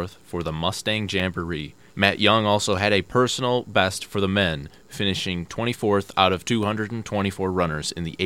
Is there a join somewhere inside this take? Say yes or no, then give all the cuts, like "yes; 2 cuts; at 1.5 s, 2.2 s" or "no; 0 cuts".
yes; 1 cut; at 1.9 s